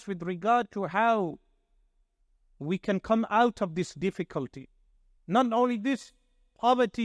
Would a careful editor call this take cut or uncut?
cut